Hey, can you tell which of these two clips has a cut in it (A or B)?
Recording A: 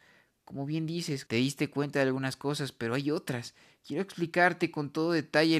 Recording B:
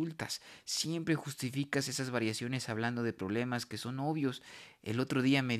A